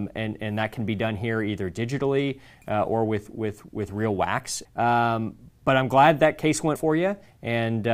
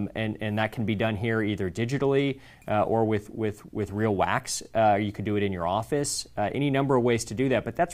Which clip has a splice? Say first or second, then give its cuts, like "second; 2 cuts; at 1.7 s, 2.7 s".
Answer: first; 2 cuts; at 4.6 s, 6.8 s